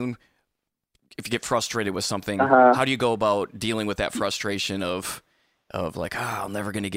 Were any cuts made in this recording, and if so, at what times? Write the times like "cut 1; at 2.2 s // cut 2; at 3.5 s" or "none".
none